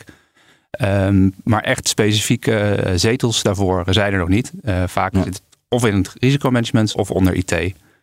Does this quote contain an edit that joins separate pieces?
yes; 1 cut; at 6.9 s

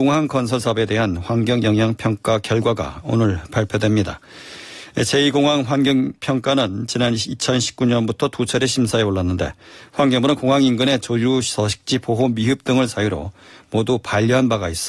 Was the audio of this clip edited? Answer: no; 0 cuts

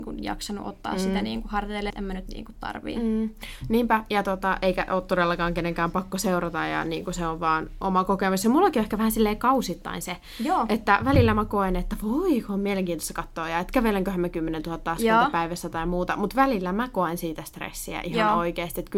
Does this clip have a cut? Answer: yes; 1 cut; at 1.9 s

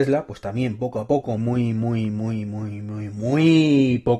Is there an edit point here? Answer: yes; 1 cut; at 1.4 s

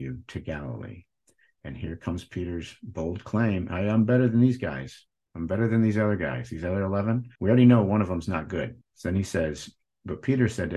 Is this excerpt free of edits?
no; 2 cuts; at 7.4 s, 8.8 s

